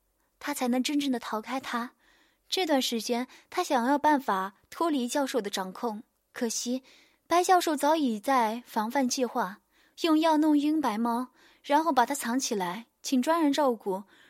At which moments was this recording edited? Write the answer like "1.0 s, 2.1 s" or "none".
none